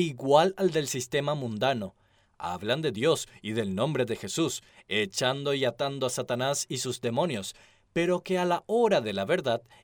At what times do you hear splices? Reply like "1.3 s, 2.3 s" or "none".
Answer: none